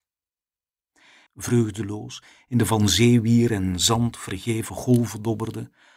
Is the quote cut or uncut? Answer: cut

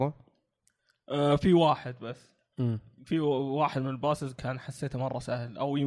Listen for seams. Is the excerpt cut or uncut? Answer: uncut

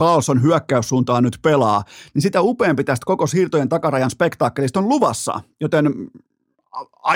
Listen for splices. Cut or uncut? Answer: uncut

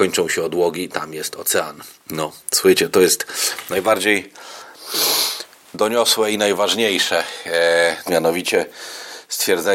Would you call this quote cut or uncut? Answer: cut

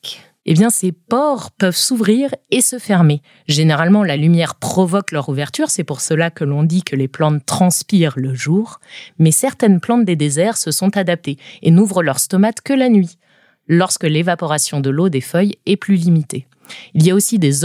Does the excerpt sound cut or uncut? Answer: uncut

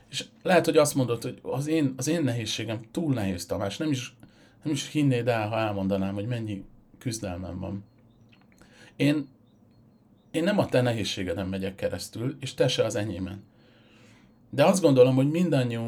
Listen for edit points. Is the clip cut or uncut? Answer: uncut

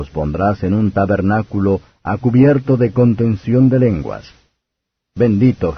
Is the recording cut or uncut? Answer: uncut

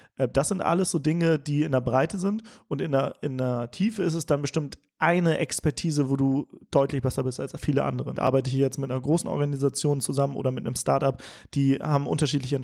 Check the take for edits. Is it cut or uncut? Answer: cut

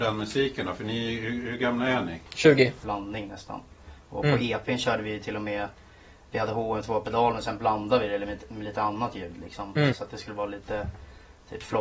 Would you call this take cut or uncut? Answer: cut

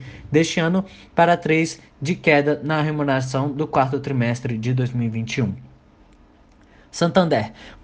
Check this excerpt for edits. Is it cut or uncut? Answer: uncut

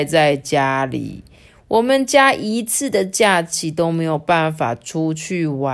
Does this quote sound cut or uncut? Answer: uncut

